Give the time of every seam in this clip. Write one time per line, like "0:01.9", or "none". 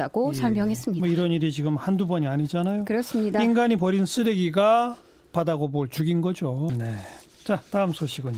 0:06.7